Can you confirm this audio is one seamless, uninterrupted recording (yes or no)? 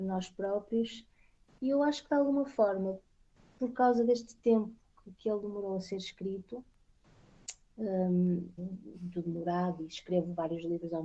no